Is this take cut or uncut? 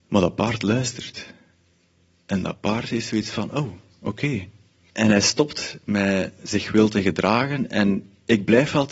cut